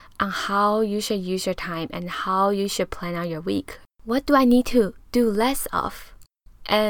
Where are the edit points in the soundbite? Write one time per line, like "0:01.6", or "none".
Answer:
0:03.9